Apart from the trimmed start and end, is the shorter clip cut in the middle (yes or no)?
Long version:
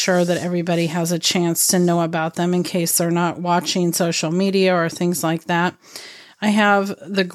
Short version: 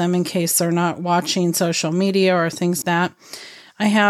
yes